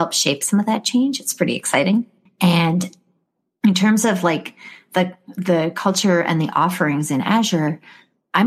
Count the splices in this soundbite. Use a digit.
1